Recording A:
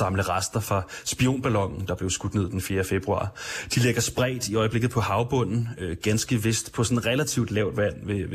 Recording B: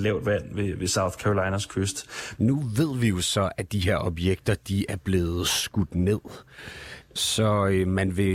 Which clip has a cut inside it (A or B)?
B